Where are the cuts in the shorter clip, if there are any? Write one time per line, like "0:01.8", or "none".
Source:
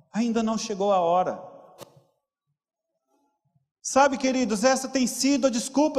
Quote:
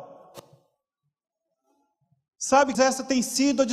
0:02.7